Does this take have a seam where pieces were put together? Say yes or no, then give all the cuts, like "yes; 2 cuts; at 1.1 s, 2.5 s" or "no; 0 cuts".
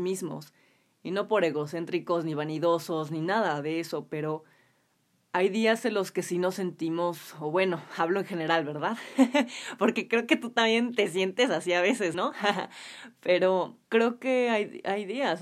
yes; 2 cuts; at 12.1 s, 13.8 s